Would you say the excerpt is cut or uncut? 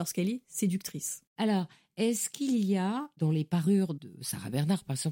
cut